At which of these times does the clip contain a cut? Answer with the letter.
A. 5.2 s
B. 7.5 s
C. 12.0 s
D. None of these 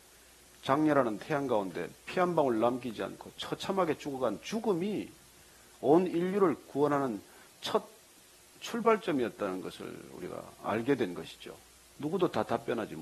C